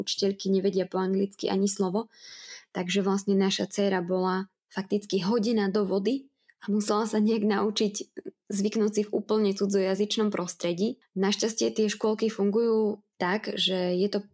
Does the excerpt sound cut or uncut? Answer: cut